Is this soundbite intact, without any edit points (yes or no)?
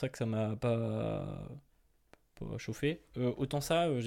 yes